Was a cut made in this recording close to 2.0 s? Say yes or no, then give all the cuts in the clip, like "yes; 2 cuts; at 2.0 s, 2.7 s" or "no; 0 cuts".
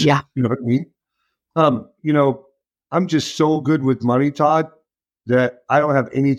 yes; 1 cut; at 2.0 s